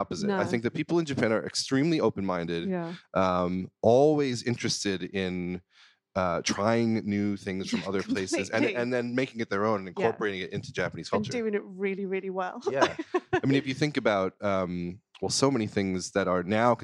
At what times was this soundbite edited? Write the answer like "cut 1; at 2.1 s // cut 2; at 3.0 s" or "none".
none